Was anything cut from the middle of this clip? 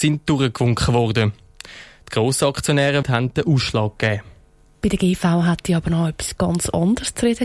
yes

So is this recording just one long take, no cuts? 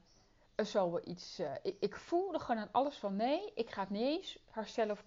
yes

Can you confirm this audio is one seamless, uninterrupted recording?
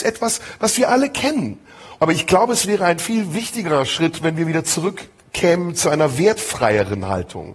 no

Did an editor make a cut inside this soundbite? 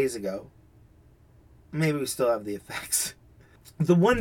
no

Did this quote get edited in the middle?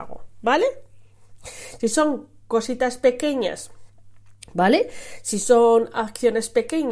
no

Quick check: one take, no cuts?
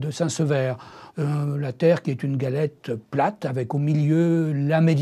no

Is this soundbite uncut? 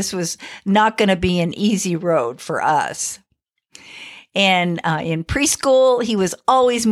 yes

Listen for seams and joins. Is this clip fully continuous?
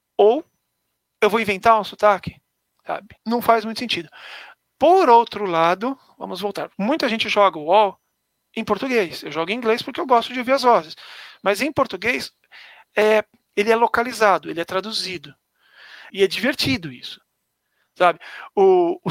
no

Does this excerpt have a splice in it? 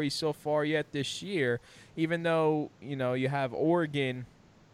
no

